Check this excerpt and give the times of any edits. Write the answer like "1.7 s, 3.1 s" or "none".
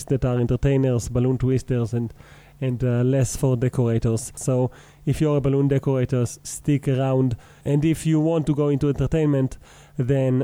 4.4 s, 7.6 s